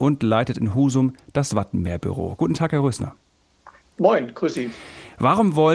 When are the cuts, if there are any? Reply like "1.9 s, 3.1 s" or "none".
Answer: none